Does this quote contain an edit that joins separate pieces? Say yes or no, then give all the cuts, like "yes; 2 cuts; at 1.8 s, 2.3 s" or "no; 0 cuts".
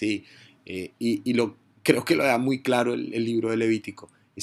no; 0 cuts